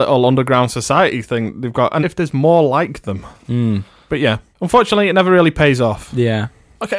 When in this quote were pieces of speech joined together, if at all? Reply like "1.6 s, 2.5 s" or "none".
2.0 s